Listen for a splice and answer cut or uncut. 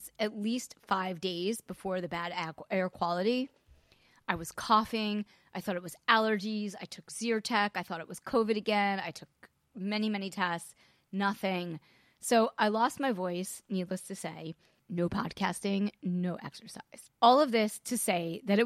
uncut